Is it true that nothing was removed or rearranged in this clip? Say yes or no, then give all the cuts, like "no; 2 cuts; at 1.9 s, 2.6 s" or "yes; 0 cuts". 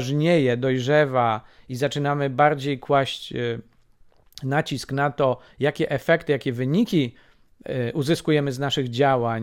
yes; 0 cuts